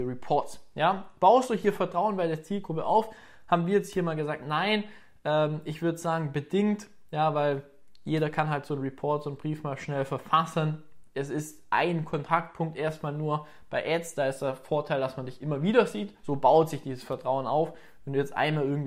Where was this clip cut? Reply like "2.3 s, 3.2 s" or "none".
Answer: 16.2 s

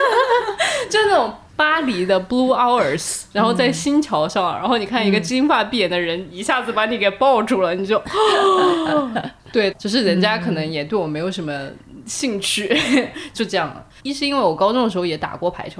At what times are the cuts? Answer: 9.7 s, 14.0 s

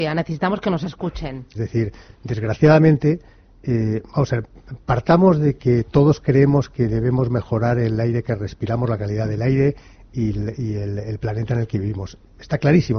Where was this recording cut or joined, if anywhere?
1.5 s

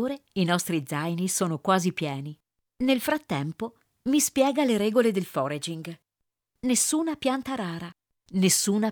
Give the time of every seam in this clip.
6.4 s

